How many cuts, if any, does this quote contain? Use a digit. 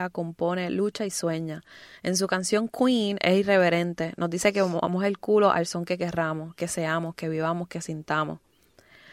0